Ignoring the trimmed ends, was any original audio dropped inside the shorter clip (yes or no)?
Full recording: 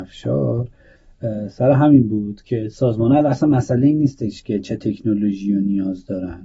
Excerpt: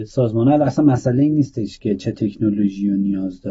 no